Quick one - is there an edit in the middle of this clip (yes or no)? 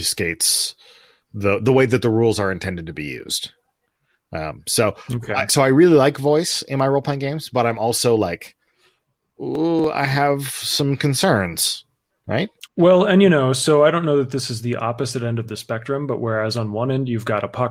yes